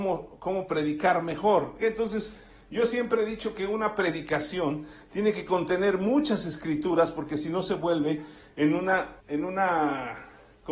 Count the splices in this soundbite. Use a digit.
2